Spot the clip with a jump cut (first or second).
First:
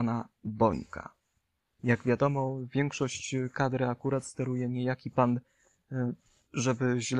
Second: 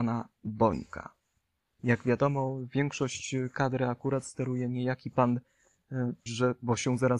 second